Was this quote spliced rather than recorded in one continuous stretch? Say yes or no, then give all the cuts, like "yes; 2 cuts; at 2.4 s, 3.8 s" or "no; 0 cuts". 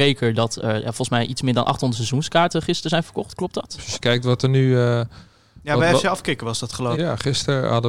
yes; 2 cuts; at 3.8 s, 6.9 s